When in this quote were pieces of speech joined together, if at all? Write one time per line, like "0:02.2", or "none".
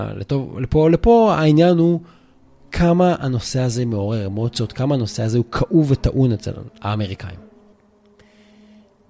none

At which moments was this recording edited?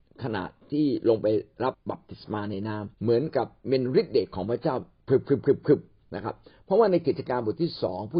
0:01.7
0:02.9

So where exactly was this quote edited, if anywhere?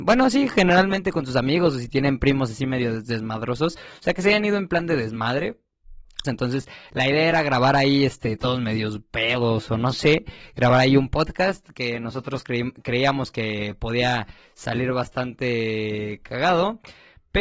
0:06.2

